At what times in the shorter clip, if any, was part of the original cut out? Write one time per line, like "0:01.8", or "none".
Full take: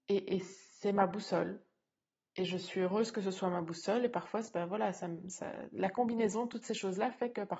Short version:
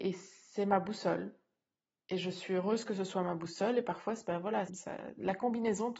0:04.7